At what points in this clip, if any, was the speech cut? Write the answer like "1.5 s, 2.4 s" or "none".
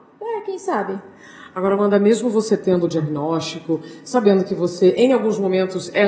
none